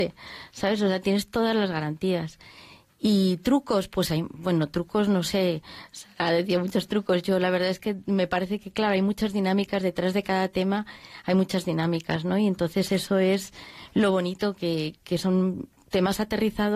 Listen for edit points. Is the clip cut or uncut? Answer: uncut